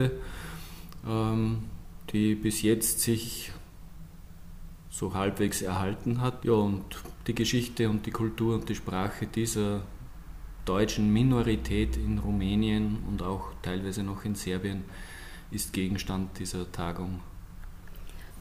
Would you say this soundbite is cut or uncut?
cut